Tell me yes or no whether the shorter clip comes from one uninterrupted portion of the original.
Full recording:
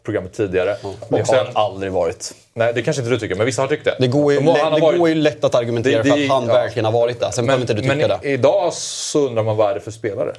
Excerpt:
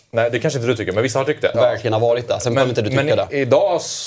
no